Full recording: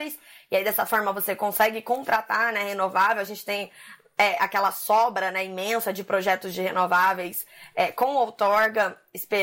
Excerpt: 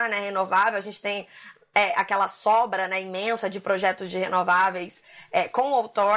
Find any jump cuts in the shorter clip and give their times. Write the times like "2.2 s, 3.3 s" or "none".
none